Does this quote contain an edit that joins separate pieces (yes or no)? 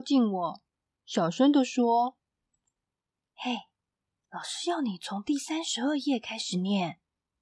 no